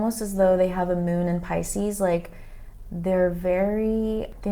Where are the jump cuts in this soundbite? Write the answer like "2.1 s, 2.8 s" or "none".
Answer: none